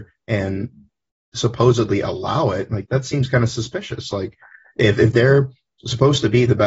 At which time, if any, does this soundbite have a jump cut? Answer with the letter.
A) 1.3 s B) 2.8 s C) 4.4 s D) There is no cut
B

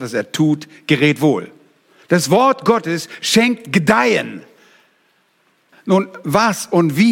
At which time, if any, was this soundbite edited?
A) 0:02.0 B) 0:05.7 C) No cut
B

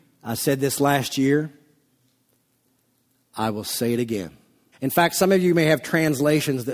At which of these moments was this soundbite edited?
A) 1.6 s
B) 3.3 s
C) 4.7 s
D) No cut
C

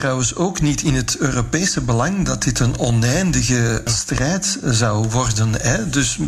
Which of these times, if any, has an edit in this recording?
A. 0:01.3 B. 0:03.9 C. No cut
B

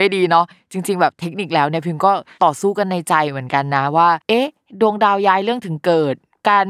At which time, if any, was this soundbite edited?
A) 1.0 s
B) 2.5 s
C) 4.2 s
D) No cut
C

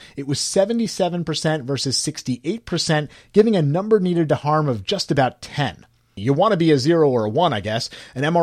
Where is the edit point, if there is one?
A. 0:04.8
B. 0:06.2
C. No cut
B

